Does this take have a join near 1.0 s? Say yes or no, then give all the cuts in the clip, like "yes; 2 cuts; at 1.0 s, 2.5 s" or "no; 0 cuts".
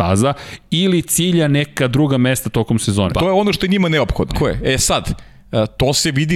no; 2 cuts; at 3.1 s, 4.3 s